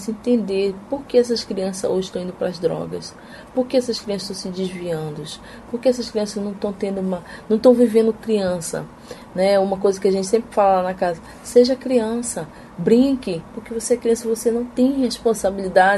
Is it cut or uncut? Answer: cut